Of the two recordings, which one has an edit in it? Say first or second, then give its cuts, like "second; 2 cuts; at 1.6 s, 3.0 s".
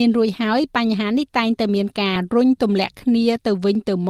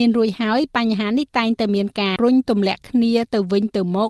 second; 1 cut; at 2.2 s